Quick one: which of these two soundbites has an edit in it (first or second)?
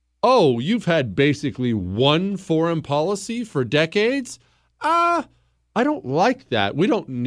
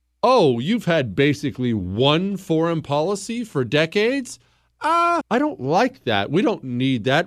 second